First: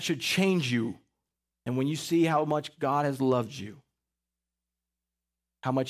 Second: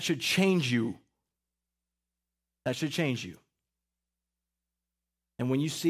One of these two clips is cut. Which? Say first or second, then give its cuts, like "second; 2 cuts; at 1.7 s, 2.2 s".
first; 1 cut; at 1.5 s